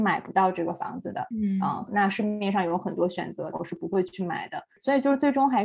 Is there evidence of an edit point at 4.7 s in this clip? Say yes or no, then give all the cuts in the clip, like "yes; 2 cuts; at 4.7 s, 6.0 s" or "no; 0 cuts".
no; 2 cuts; at 1.9 s, 3.5 s